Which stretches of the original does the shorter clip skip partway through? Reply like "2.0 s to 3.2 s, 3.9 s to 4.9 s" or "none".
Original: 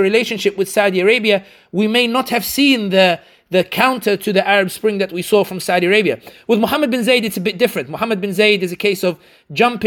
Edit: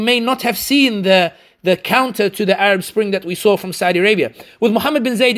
none